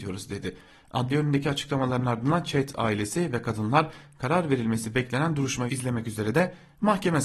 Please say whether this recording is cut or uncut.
cut